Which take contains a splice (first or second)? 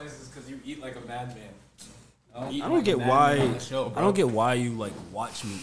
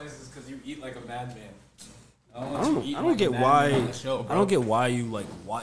first